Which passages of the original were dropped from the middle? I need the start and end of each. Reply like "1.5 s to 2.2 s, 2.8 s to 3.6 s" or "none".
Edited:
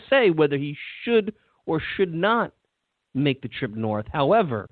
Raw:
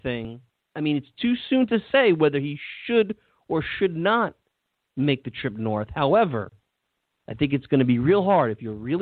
none